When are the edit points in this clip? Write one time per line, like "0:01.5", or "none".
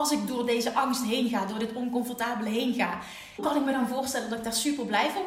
0:03.4